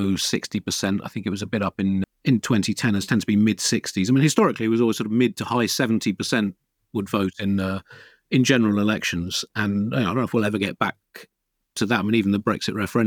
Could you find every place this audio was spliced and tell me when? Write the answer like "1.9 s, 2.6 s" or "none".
2.0 s